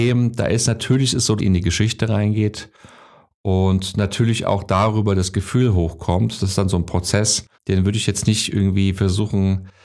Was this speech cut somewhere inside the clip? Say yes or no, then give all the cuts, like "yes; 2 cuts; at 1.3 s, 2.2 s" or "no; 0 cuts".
yes; 2 cuts; at 1.4 s, 7.5 s